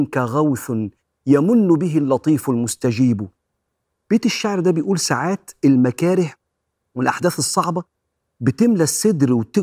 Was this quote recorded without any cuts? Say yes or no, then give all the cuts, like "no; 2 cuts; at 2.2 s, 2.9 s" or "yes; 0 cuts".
yes; 0 cuts